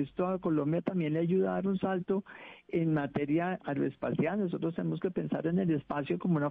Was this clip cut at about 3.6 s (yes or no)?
yes